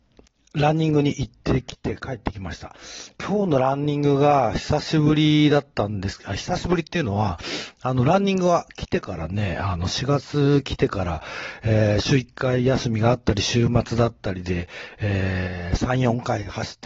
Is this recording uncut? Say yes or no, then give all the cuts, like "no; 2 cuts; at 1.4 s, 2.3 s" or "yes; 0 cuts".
yes; 0 cuts